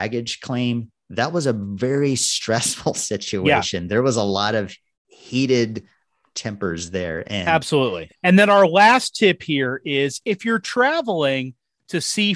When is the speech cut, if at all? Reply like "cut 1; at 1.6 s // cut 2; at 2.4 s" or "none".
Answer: cut 1; at 8.1 s